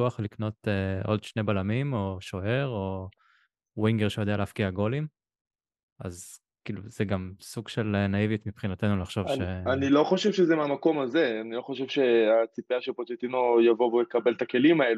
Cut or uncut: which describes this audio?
uncut